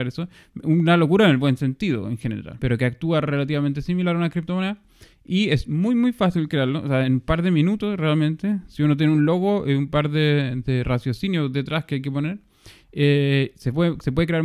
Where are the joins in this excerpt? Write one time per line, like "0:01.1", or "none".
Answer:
0:02.6